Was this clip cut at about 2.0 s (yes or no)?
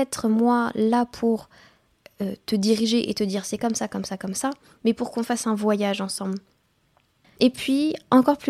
no